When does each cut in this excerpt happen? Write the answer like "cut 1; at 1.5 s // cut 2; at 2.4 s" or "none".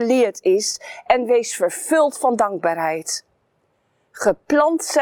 none